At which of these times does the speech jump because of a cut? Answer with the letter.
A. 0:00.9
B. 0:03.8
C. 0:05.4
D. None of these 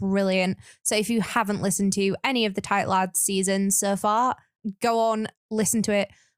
D